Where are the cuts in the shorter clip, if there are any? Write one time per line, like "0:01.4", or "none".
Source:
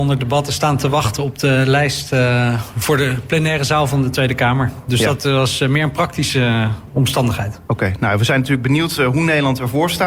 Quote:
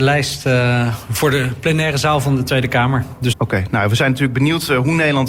0:03.3